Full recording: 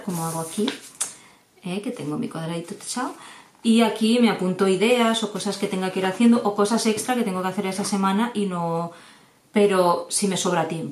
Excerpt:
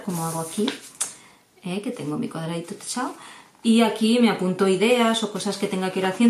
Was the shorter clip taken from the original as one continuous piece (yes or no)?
yes